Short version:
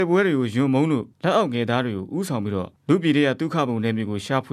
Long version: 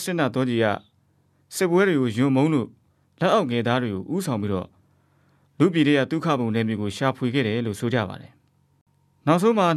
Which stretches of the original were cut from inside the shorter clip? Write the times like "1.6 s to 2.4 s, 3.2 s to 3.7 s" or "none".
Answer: 2.8 s to 3.1 s, 4.7 s to 5.5 s

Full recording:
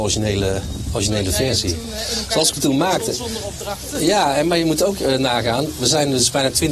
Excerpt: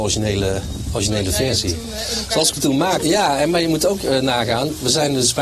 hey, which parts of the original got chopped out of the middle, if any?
3.0 s to 4.0 s

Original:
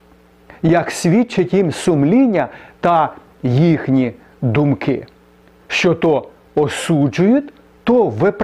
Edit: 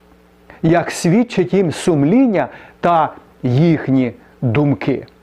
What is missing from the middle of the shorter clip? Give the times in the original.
none

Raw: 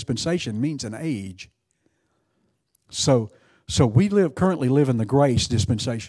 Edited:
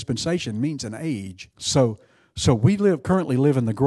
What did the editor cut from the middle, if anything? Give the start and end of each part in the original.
1.5 s to 2.8 s

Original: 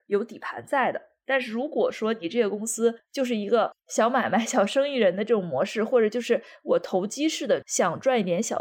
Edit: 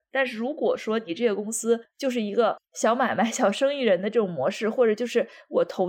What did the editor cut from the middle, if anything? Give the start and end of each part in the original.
none

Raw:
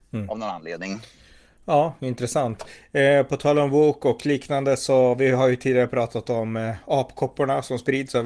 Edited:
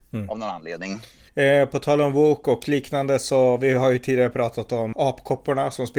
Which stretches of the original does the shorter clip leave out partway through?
1.3 s to 2.9 s, 6.5 s to 6.8 s

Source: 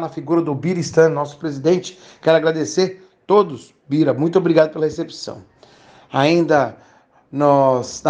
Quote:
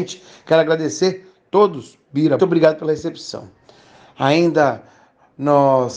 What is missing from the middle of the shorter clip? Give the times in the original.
4.1 s to 4.3 s

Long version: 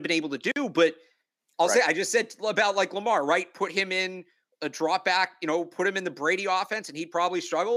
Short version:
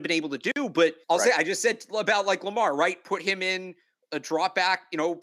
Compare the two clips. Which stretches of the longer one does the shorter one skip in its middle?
1.0 s to 1.5 s

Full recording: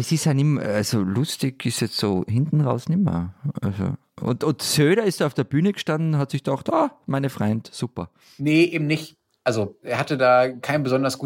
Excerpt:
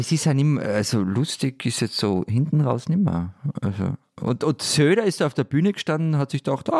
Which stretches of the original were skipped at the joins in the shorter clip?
none

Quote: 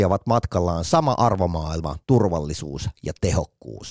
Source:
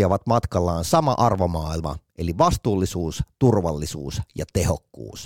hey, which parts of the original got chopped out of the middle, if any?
2.0 s to 3.4 s

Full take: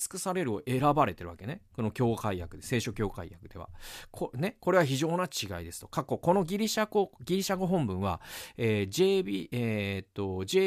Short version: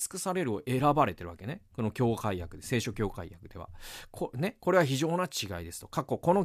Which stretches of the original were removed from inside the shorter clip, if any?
none

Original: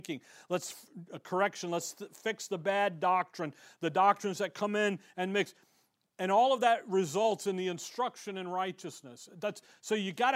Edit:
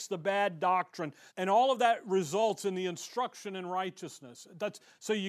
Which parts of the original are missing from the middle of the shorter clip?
3.7 s to 6.1 s

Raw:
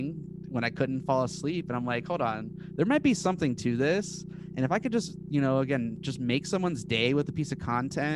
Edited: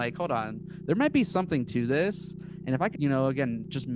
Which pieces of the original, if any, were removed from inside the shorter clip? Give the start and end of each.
4.8 s to 5.3 s

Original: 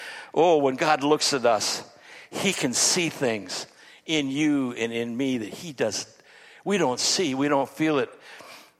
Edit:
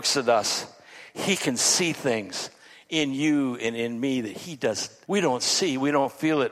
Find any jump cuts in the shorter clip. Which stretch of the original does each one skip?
6.2 s to 6.6 s

